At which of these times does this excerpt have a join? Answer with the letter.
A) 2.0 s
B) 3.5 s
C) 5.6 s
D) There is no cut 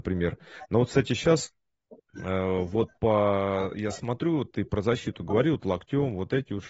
A